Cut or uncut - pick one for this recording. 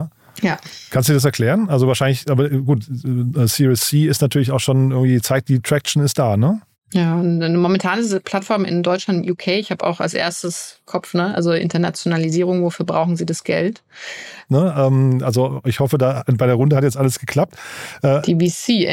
cut